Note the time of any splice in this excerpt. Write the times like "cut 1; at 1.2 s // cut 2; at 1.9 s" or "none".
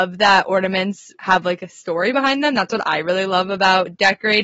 cut 1; at 1.2 s